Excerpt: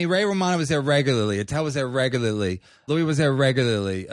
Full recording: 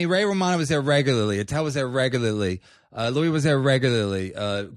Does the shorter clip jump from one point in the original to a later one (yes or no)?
yes